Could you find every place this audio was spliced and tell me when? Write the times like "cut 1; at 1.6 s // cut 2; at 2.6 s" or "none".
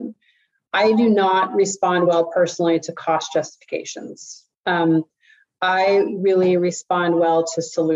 none